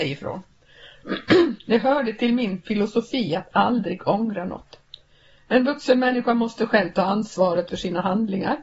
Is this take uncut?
yes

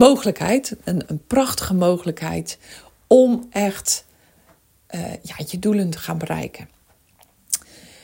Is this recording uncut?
no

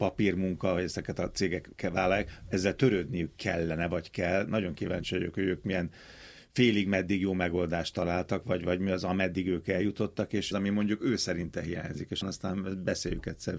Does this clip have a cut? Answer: yes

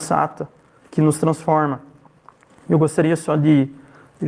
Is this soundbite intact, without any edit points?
yes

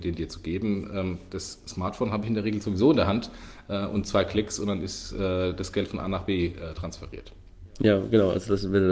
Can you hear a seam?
no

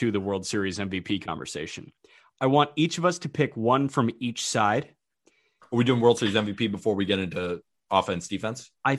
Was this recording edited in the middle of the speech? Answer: no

